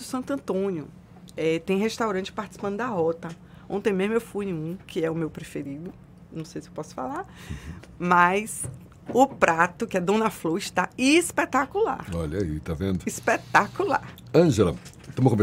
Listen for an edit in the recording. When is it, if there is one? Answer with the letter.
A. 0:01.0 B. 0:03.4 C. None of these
C